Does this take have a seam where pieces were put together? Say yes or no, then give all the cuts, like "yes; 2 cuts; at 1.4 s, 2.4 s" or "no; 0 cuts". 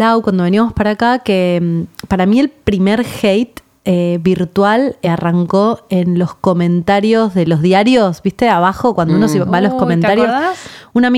no; 0 cuts